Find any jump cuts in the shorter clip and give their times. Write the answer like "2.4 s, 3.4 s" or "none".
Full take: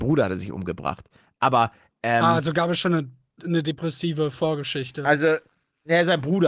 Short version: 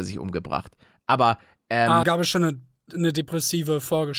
2.0 s